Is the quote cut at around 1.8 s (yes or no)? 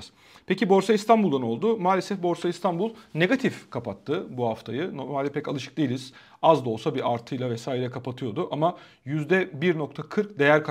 no